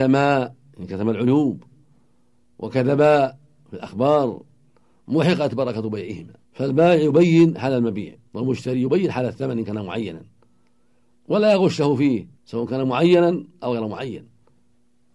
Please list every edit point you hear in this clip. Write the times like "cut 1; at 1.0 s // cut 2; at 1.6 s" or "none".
cut 1; at 6.4 s // cut 2; at 8.2 s // cut 3; at 12.3 s